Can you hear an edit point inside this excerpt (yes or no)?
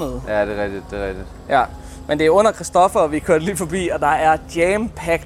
no